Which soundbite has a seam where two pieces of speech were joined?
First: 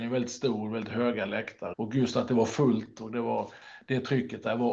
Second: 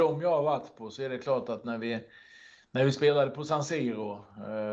first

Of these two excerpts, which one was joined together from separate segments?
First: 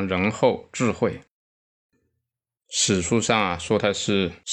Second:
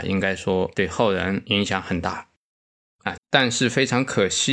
second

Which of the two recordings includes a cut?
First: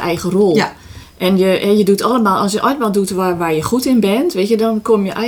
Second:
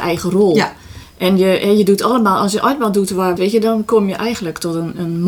second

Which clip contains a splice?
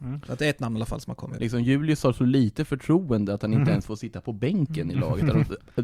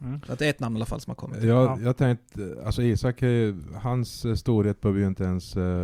first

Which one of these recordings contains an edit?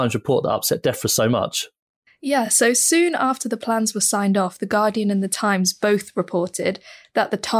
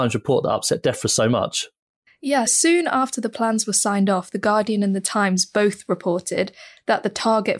second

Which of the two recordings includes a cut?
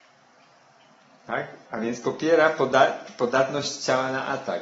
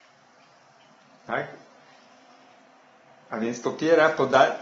first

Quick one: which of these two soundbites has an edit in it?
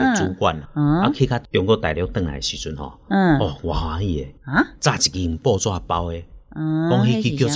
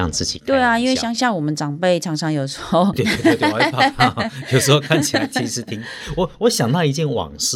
second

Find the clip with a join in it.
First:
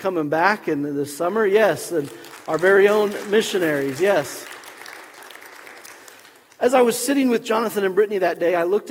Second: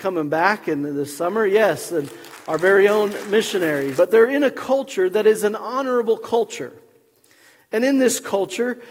second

